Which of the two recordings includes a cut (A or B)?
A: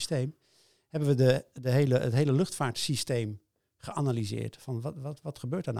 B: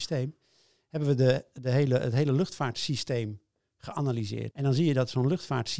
B